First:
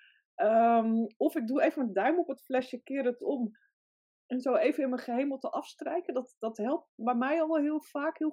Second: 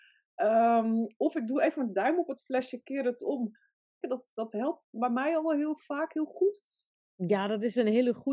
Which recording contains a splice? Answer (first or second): second